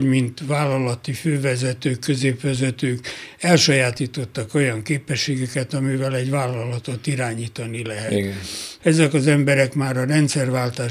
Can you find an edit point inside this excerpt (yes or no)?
yes